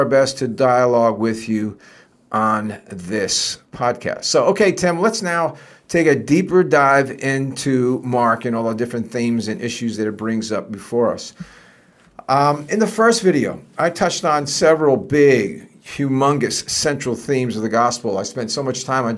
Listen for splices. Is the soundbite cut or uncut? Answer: uncut